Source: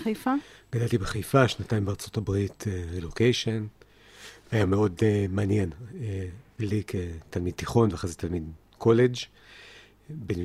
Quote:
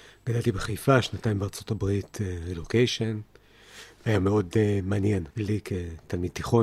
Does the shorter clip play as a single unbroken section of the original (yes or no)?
no